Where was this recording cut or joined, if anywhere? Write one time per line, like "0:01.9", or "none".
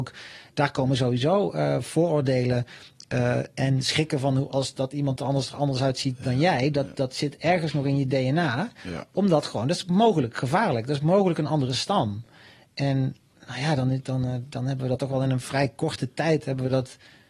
none